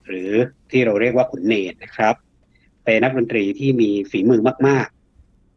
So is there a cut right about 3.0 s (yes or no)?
yes